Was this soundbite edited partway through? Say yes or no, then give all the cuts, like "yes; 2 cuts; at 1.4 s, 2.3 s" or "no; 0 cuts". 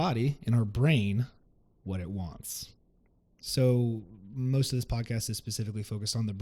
no; 0 cuts